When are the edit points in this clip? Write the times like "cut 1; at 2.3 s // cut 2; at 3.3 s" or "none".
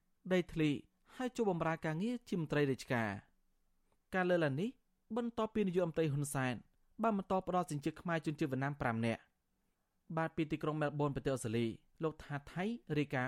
none

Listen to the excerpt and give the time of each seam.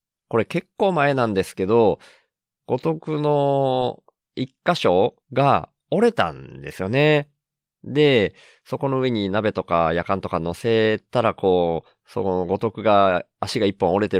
cut 1; at 5.2 s

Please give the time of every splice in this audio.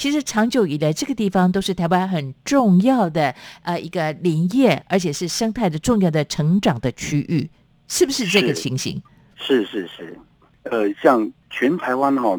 none

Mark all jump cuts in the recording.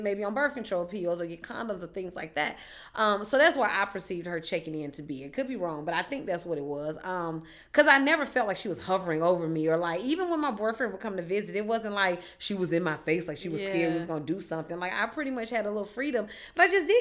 none

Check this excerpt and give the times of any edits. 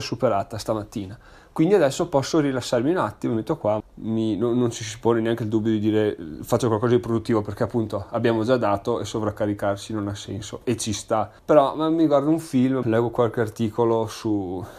cut 1; at 3.8 s // cut 2; at 11.4 s // cut 3; at 12.8 s

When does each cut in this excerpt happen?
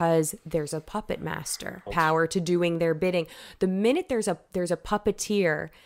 cut 1; at 1.9 s

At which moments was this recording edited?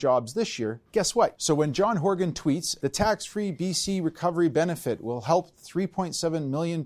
cut 1; at 1.4 s // cut 2; at 2.8 s

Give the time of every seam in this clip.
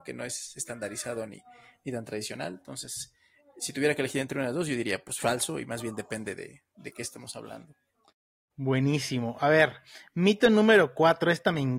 none

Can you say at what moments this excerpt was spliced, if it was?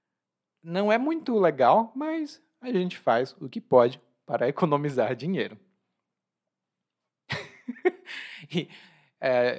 cut 1; at 7.1 s

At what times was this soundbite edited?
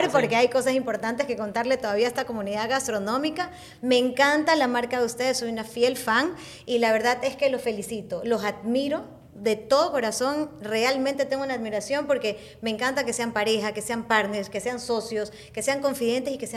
none

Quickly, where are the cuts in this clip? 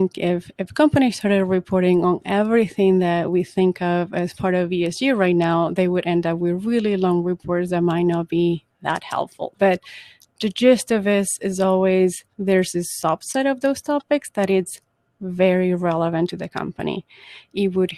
cut 1; at 9.5 s // cut 2; at 12.3 s

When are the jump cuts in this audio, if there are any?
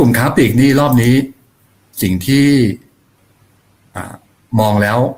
none

